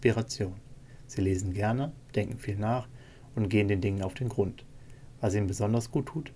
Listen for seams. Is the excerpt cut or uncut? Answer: uncut